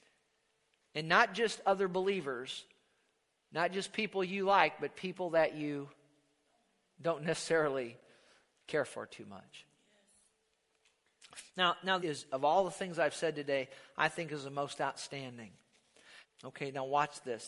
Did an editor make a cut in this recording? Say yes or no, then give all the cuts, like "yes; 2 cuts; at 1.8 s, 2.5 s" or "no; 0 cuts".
yes; 2 cuts; at 12.0 s, 16.2 s